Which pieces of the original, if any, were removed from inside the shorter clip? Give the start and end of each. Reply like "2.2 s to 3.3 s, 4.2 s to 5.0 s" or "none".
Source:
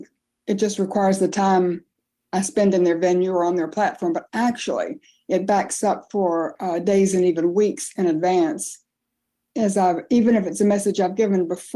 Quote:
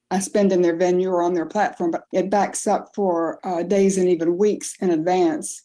4.3 s to 5.2 s